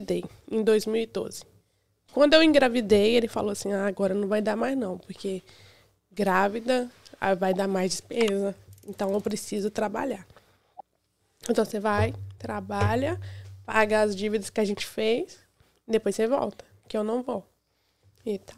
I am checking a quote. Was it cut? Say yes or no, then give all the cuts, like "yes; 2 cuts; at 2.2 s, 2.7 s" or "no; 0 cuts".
no; 0 cuts